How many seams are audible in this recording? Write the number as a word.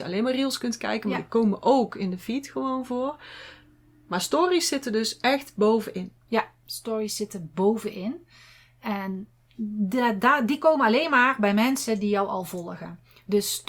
zero